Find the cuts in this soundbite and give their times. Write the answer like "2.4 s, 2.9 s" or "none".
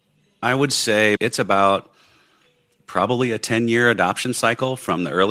1.2 s